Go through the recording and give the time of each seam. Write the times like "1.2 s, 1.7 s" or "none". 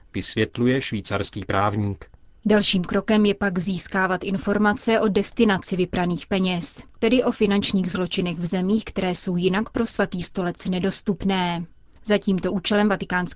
none